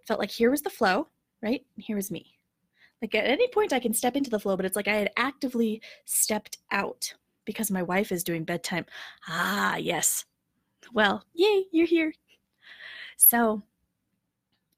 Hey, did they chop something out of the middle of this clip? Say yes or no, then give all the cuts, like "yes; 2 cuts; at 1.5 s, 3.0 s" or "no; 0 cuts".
no; 0 cuts